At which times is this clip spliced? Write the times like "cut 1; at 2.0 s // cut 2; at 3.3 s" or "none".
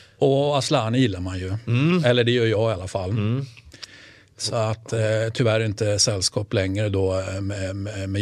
none